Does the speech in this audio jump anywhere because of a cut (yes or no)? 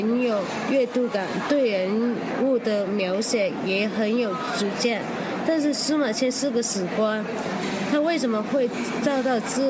no